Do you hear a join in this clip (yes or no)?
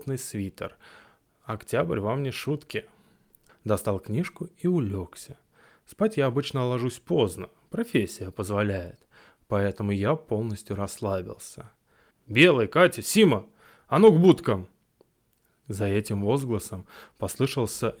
yes